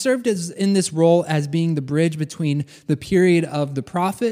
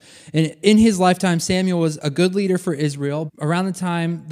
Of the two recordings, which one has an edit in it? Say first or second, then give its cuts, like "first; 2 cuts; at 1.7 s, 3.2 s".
second; 1 cut; at 3.3 s